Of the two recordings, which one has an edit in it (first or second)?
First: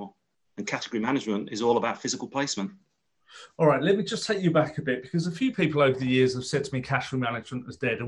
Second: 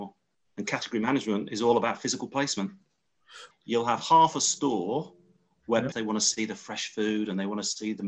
second